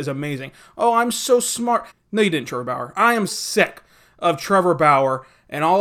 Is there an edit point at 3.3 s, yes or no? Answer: yes